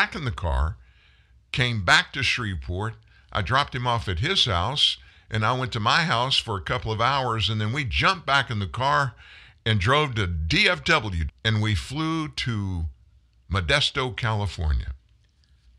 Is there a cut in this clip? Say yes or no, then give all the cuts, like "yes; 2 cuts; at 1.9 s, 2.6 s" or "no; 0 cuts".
yes; 1 cut; at 11.3 s